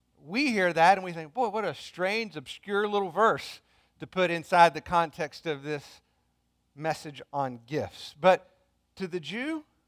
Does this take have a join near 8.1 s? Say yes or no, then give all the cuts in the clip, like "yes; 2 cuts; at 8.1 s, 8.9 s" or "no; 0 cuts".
no; 0 cuts